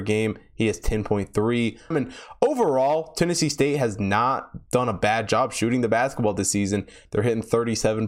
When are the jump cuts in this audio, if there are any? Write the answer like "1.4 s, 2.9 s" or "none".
1.9 s, 7.1 s